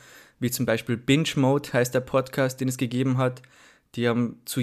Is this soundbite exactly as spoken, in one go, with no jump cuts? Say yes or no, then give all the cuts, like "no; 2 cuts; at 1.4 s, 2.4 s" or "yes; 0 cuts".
yes; 0 cuts